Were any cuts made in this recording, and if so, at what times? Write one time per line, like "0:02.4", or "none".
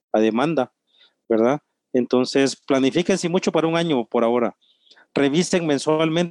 none

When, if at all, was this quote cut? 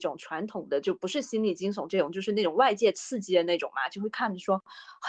none

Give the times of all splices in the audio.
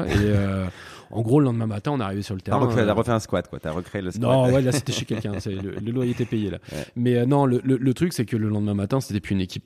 none

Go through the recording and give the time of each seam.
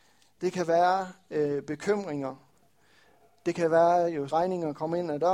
0:04.3

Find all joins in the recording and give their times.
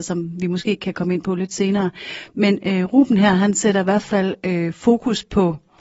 none

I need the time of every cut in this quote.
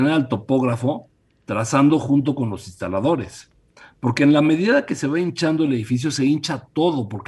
none

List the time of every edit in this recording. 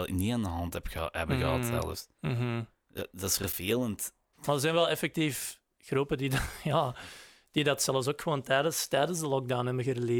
0:04.3

